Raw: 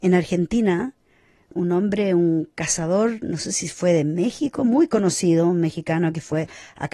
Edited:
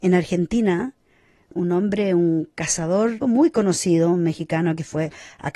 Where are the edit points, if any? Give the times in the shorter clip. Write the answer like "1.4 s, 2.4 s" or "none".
3.2 s